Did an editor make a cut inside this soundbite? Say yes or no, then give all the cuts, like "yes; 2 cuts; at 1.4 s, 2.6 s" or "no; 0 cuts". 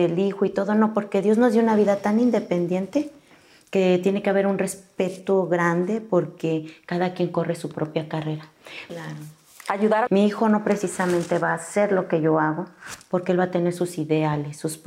yes; 2 cuts; at 8.9 s, 10.1 s